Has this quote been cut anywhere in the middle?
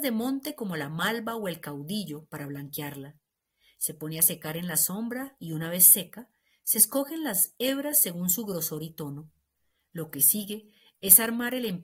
no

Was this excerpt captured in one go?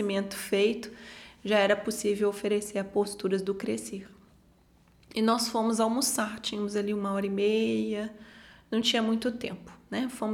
yes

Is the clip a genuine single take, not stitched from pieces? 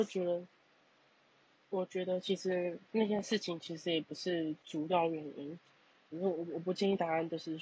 no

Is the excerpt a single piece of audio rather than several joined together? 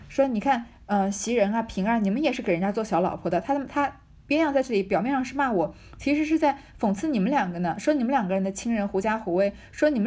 yes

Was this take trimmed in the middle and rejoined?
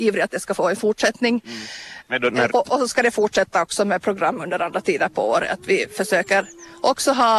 yes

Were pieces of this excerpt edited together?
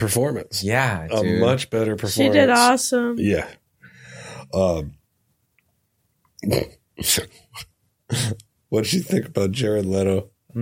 no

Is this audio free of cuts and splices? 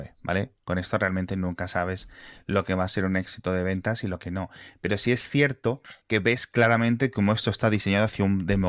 no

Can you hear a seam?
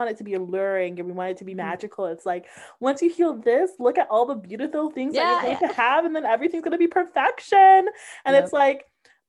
no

